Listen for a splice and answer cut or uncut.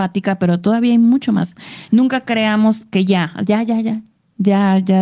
uncut